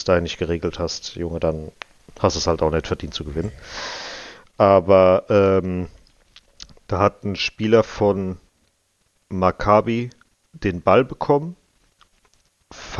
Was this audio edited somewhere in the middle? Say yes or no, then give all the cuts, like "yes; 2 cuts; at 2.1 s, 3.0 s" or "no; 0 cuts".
no; 0 cuts